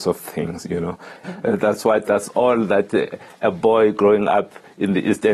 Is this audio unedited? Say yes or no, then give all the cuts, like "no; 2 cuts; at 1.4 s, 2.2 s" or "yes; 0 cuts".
no; 1 cut; at 1.2 s